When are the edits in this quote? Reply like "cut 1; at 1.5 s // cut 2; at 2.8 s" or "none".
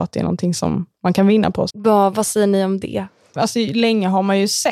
cut 1; at 1.7 s // cut 2; at 3.4 s